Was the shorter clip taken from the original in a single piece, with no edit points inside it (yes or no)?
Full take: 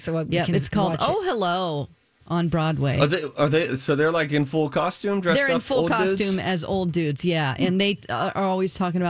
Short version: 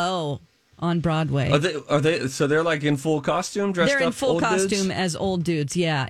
yes